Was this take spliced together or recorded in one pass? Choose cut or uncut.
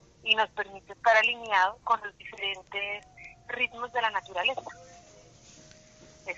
uncut